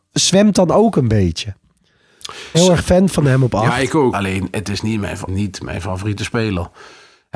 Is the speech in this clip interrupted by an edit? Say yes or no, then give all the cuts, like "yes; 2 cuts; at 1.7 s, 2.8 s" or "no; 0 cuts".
yes; 3 cuts; at 2.5 s, 4.1 s, 5.3 s